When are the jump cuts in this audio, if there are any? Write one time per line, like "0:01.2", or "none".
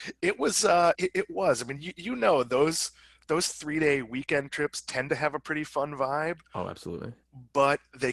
0:00.9